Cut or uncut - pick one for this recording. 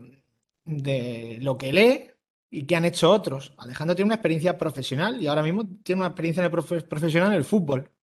uncut